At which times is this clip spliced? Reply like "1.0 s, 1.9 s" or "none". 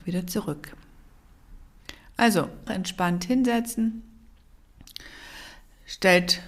2.7 s